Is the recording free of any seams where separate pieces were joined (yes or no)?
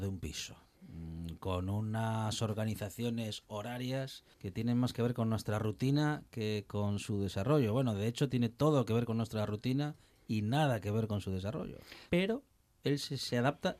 no